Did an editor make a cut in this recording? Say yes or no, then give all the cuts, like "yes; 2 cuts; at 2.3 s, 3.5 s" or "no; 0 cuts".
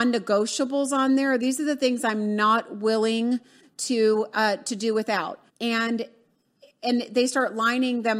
yes; 1 cut; at 5.5 s